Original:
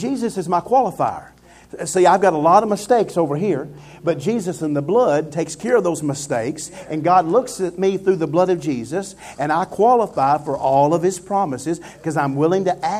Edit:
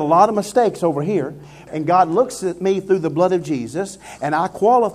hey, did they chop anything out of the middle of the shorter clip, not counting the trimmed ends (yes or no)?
yes